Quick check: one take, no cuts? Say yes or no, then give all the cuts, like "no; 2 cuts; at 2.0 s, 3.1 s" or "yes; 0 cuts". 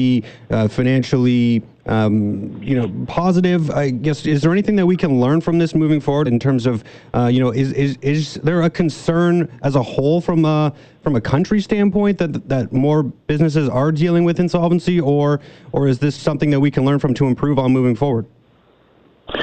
no; 2 cuts; at 6.3 s, 16.2 s